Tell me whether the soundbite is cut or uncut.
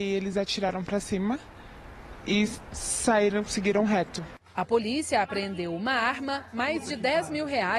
uncut